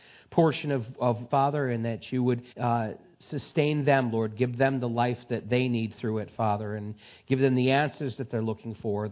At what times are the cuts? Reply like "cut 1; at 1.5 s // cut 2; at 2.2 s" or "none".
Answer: cut 1; at 1.3 s // cut 2; at 2.5 s